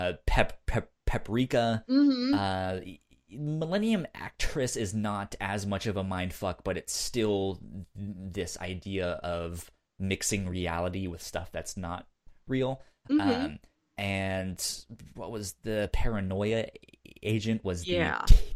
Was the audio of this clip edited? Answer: no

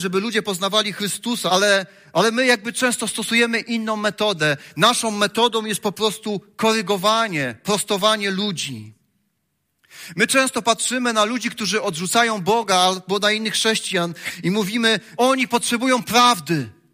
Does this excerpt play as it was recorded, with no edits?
no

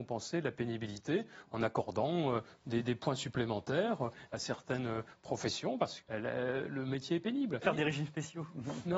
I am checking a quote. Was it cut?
yes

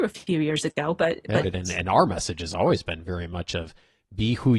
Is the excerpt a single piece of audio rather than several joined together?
no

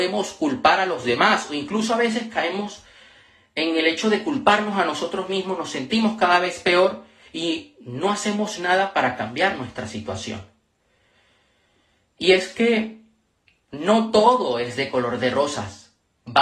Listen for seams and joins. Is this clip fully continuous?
yes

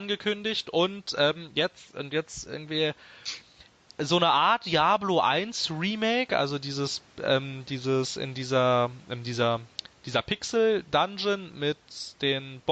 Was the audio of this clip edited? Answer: no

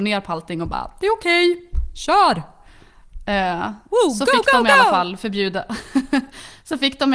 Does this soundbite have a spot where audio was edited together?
no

